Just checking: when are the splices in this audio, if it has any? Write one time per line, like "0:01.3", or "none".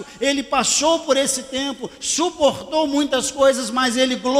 none